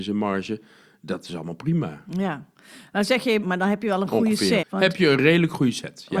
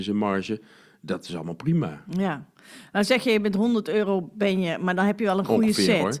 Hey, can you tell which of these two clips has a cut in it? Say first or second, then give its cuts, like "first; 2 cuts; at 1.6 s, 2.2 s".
first; 2 cuts; at 3.4 s, 4.6 s